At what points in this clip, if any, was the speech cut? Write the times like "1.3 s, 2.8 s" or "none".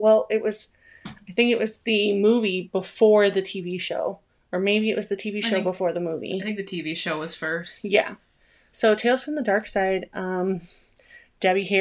none